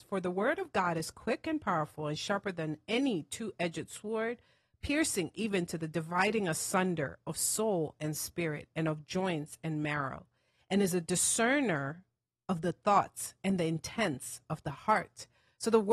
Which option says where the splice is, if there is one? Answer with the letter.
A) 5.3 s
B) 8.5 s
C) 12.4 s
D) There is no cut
D